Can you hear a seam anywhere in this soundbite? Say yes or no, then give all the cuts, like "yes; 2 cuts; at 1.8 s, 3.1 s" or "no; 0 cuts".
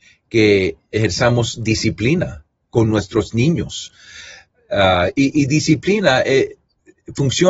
no; 0 cuts